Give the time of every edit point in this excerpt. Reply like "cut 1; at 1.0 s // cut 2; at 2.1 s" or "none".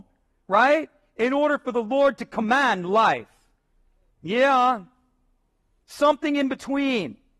cut 1; at 4.1 s